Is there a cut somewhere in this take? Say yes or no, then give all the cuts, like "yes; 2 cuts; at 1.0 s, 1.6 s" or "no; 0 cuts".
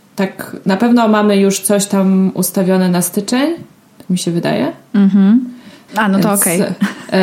yes; 1 cut; at 5.9 s